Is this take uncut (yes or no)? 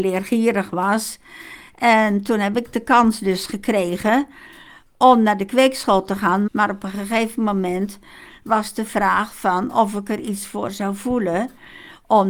no